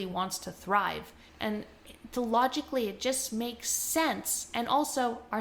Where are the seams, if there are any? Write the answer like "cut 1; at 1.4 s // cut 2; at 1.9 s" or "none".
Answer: cut 1; at 1.3 s